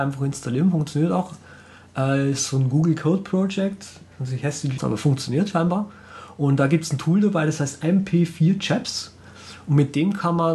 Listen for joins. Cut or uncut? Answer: cut